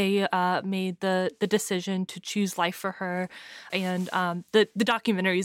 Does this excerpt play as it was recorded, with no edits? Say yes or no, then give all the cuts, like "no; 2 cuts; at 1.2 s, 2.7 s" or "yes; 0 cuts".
no; 1 cut; at 3.7 s